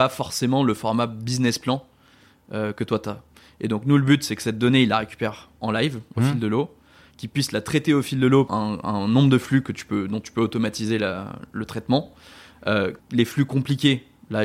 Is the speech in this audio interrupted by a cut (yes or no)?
yes